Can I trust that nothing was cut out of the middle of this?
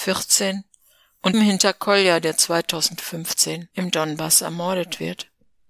no; 2 cuts; at 1.3 s, 3.7 s

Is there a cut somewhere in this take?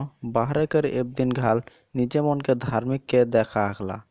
yes; 1 cut; at 3.1 s

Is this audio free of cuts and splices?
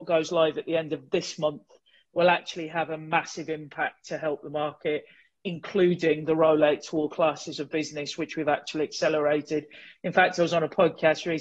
yes; 0 cuts

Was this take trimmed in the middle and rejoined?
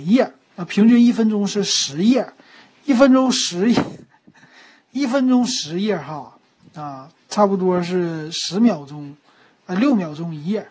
no; 0 cuts

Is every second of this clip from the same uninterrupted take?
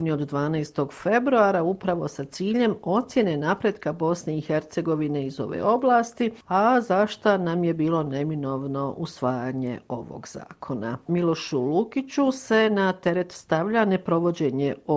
no; 1 cut; at 11.1 s

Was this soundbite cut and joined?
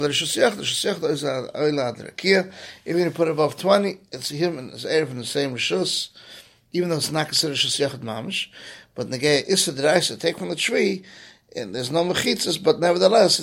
no; 0 cuts

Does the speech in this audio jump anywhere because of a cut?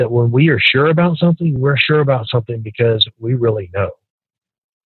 no; 0 cuts

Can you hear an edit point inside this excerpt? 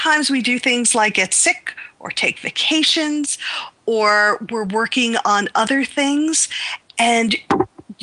no; 0 cuts

